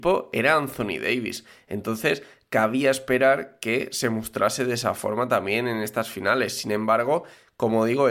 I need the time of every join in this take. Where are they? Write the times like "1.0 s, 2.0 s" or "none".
none